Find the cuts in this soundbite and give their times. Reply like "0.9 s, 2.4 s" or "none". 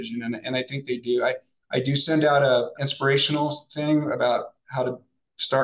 2.7 s